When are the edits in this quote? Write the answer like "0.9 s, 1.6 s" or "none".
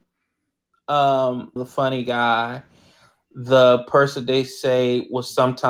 1.6 s